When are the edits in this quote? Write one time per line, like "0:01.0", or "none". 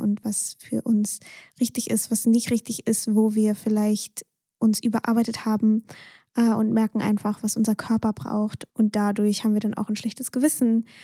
0:08.7